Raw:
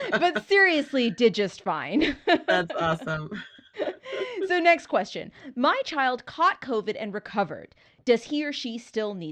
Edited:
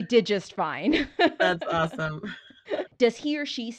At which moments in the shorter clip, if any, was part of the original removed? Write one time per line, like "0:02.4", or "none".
0:02.9